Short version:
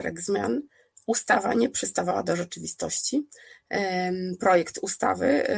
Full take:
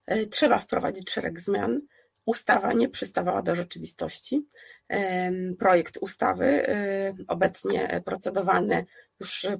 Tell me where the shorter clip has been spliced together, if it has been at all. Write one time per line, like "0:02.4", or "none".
none